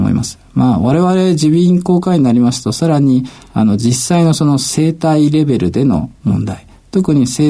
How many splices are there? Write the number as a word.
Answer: zero